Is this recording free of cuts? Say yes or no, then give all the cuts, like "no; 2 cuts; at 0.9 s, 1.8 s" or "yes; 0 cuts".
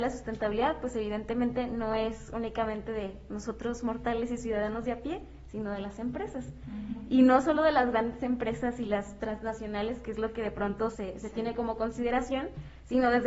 yes; 0 cuts